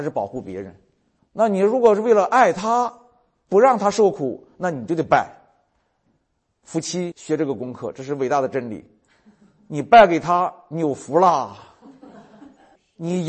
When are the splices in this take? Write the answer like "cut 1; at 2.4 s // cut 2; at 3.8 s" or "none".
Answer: cut 1; at 1.2 s